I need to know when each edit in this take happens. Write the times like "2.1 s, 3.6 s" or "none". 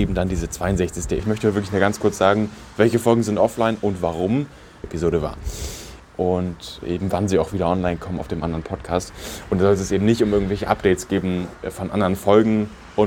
1.2 s, 4.8 s, 6.0 s